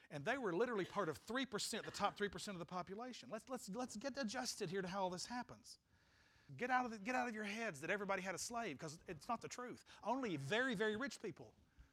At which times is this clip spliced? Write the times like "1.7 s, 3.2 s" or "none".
6.5 s